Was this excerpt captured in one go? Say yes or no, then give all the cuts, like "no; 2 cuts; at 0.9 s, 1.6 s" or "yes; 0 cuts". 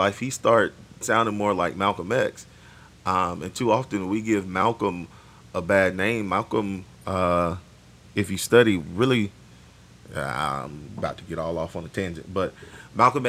yes; 0 cuts